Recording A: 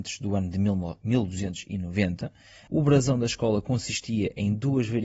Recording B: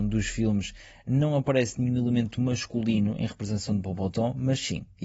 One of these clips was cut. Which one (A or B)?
A